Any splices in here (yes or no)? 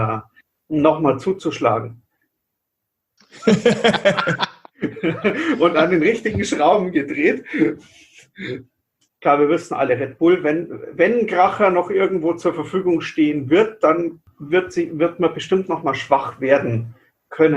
yes